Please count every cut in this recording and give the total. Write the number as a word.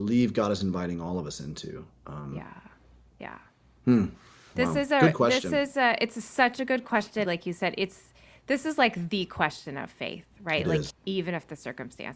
two